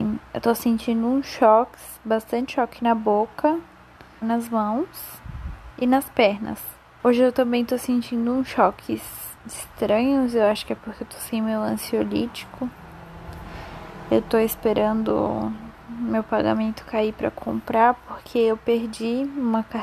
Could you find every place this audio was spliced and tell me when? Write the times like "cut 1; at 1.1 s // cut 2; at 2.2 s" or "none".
cut 1; at 4.2 s // cut 2; at 7.0 s // cut 3; at 9.4 s